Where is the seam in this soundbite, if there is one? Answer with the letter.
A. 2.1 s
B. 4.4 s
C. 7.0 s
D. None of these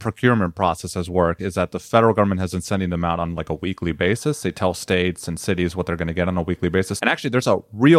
C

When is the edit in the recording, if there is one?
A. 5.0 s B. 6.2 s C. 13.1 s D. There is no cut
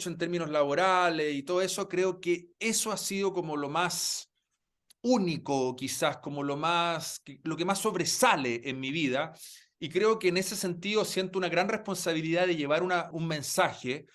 C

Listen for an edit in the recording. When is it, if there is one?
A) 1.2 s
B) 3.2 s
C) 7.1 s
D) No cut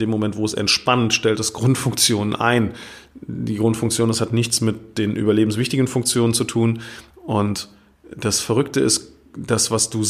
C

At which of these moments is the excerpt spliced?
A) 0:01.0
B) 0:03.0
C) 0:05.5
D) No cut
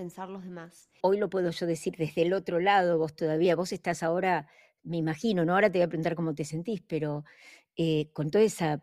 A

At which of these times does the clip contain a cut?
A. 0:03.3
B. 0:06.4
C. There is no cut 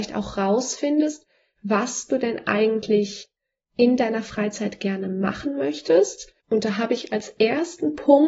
B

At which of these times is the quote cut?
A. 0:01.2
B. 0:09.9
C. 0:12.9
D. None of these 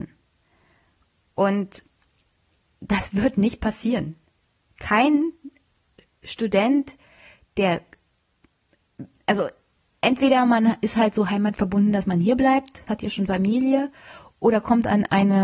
C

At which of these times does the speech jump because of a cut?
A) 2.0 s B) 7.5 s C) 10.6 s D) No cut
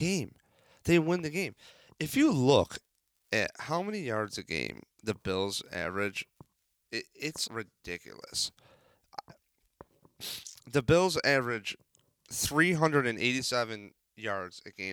B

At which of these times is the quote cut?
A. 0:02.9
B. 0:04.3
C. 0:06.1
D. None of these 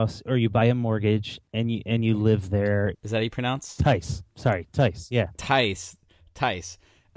A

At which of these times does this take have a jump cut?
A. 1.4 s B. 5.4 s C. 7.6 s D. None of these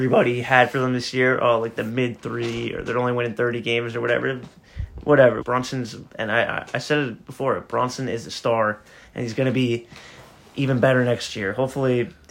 B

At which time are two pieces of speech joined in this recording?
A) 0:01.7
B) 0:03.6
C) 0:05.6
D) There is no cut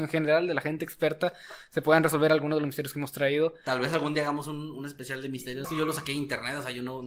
C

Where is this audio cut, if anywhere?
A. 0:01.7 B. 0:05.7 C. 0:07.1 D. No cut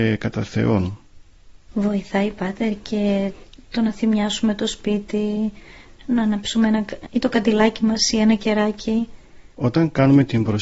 C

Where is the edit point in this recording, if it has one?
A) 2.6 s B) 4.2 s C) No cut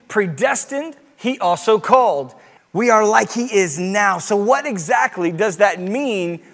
A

